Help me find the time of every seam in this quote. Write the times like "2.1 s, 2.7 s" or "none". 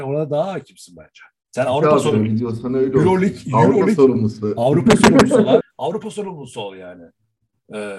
5.6 s